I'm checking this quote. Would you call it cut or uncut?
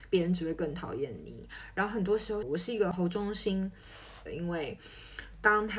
cut